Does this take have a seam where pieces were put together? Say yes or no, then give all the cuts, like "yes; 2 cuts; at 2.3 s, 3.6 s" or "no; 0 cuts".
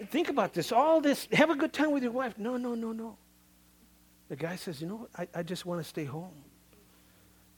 yes; 1 cut; at 1.3 s